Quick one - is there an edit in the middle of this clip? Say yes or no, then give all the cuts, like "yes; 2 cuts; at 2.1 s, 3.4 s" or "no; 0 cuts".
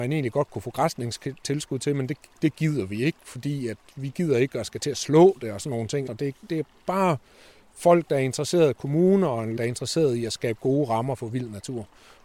yes; 2 cuts; at 6.1 s, 9.6 s